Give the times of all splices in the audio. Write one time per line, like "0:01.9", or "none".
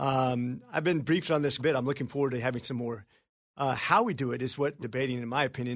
0:01.6
0:03.5
0:04.8